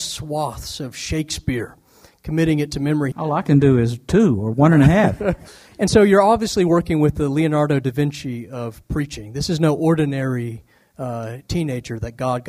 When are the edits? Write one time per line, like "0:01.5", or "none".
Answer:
0:03.1